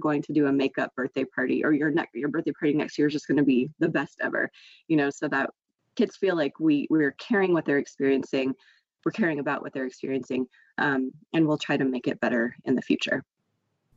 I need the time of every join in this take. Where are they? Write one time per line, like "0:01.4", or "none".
none